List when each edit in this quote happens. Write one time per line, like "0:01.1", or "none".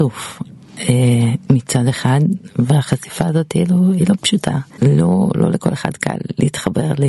0:04.7